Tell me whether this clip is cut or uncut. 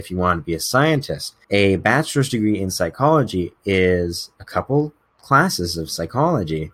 cut